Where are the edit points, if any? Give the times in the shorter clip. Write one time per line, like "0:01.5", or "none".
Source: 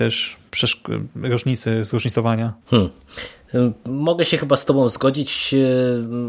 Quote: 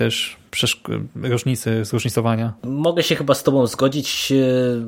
0:02.6